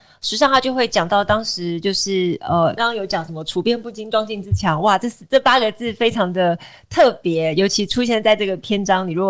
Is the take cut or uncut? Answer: cut